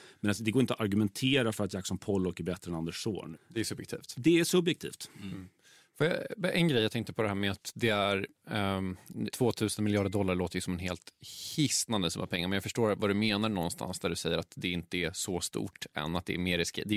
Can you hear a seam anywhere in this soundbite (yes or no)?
yes